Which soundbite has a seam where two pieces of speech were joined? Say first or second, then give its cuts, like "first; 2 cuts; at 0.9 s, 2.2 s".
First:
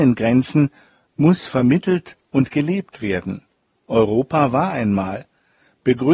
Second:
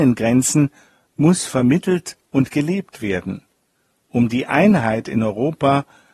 first; 1 cut; at 3.7 s